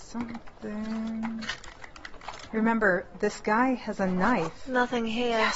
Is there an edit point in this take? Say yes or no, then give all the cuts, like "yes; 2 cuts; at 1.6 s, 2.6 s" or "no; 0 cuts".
yes; 1 cut; at 2.5 s